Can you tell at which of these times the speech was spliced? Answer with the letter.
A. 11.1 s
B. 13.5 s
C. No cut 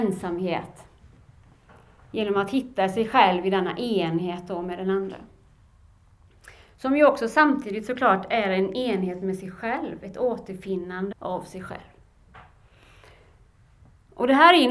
A